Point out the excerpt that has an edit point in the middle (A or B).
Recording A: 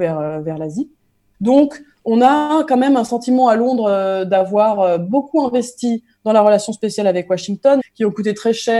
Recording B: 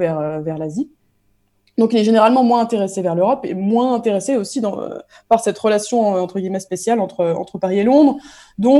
A